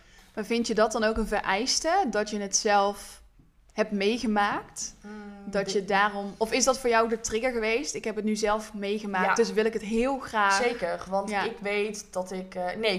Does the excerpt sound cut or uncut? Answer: uncut